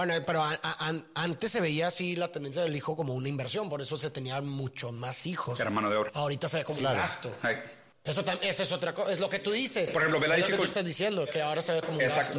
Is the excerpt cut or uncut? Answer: uncut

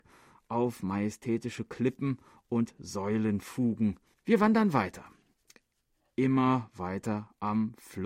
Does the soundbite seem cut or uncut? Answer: cut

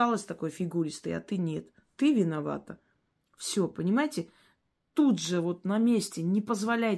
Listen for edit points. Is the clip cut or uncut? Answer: uncut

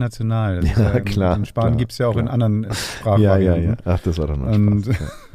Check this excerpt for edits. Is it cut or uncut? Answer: uncut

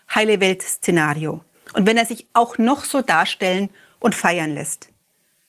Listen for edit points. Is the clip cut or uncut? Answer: cut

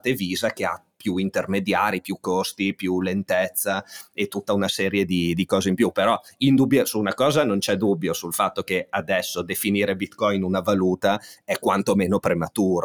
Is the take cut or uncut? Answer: uncut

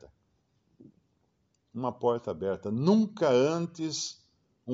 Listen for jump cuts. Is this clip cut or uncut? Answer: uncut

